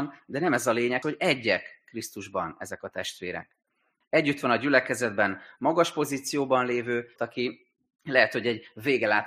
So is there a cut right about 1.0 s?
yes; 3 cuts; at 1.0 s, 4.0 s, 7.2 s

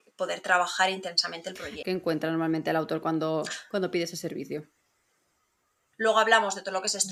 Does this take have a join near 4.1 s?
no; 2 cuts; at 1.8 s, 5.9 s

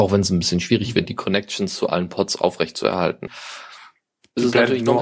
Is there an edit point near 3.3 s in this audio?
yes; 2 cuts; at 1.1 s, 3.3 s

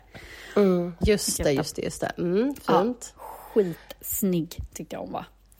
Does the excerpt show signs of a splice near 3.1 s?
no; 1 cut; at 1.0 s

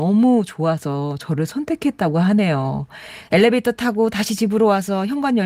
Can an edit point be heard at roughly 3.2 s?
yes; 1 cut; at 3.2 s

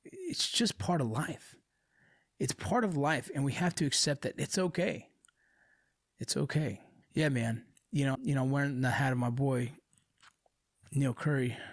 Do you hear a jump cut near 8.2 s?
yes; 2 cuts; at 7.0 s, 8.2 s

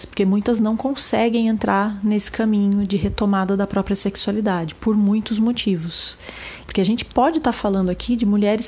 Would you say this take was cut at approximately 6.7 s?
yes; 1 cut; at 6.7 s

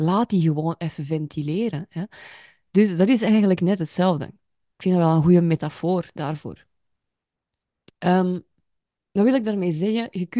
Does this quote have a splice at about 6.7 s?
no; 0 cuts

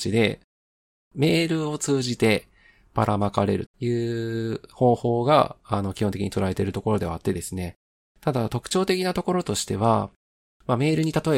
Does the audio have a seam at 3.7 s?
yes; 1 cut; at 3.7 s

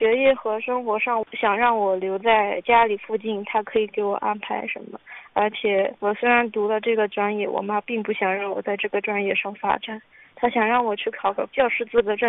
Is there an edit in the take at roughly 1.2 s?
yes; 1 cut; at 1.2 s

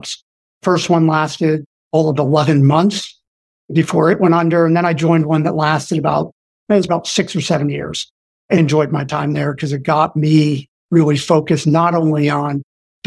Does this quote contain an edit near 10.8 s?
no; 2 cuts; at 6.9 s, 8.6 s

